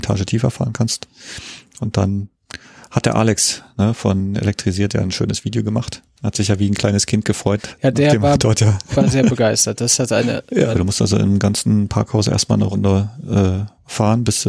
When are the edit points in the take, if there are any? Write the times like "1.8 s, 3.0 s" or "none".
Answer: 10.7 s